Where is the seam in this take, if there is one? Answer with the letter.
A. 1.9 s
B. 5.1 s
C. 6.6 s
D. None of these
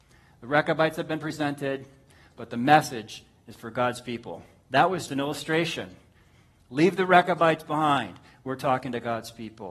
B